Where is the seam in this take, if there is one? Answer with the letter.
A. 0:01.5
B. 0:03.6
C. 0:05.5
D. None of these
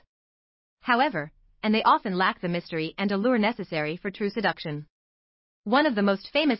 A